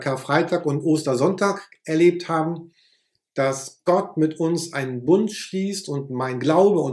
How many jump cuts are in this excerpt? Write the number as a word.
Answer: zero